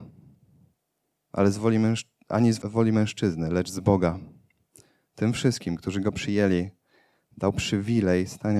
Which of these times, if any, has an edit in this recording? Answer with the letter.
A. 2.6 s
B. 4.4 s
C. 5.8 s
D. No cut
A